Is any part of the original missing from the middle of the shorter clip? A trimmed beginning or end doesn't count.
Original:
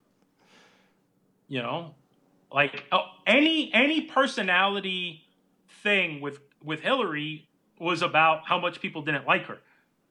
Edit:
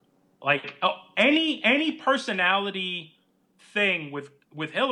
no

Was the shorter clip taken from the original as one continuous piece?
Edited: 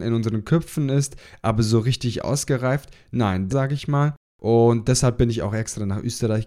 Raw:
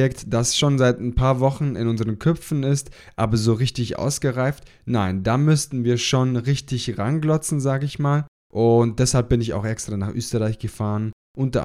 no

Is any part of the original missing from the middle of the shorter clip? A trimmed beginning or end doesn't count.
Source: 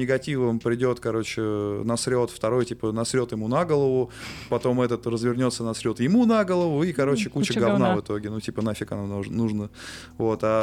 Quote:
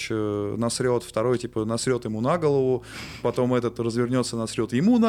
no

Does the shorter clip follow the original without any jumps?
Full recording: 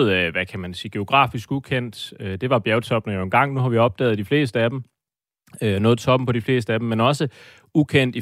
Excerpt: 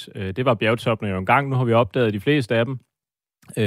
yes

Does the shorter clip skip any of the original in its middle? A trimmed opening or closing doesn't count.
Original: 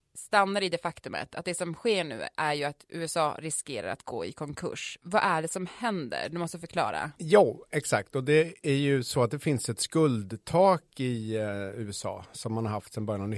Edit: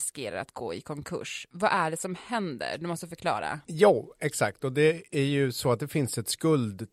no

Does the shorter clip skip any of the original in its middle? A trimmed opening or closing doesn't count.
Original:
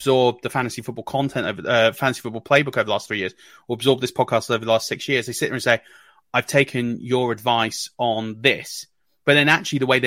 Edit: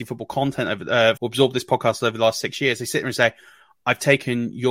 yes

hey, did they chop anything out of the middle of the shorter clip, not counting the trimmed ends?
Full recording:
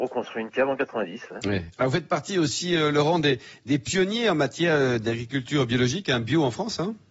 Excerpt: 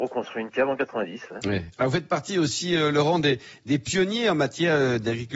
no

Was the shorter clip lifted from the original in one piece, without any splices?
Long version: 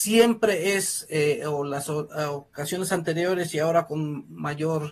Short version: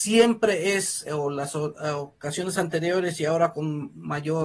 no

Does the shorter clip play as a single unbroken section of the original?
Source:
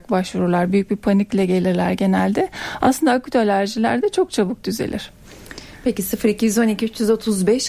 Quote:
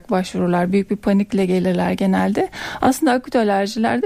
yes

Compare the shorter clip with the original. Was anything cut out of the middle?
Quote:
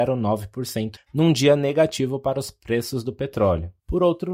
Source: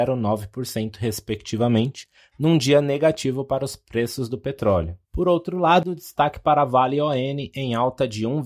yes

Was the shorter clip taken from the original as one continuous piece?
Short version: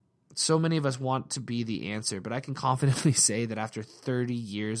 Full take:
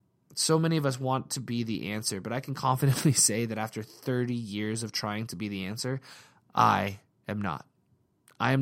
yes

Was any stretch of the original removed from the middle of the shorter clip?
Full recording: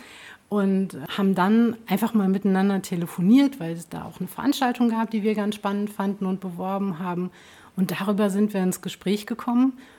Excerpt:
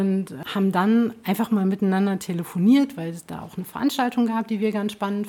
no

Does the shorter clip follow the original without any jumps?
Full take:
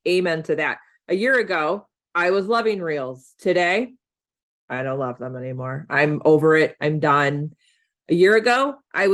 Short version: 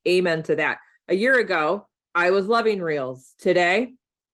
yes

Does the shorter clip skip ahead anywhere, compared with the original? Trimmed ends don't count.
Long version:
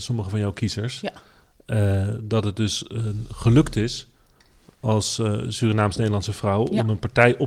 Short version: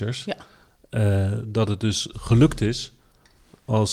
yes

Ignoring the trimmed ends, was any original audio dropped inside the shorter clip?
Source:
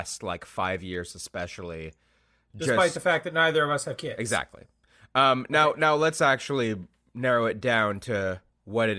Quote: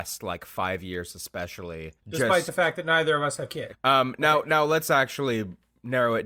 yes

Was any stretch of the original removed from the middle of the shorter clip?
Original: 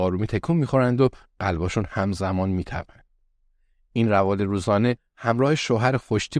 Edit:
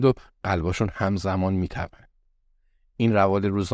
no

